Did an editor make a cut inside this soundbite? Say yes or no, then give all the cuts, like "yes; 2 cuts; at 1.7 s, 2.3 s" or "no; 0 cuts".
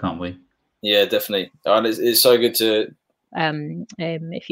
yes; 1 cut; at 3.3 s